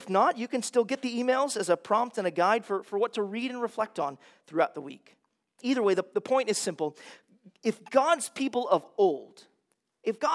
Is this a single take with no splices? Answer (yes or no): yes